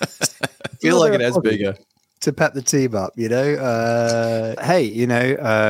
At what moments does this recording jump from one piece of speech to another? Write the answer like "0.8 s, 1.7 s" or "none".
1.4 s, 4.6 s